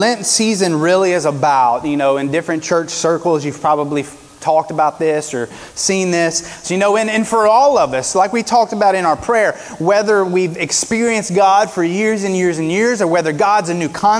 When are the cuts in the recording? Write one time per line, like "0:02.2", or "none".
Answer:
0:06.6